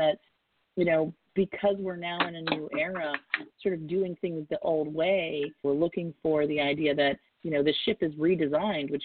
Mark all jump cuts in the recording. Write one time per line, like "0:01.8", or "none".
0:05.6
0:07.4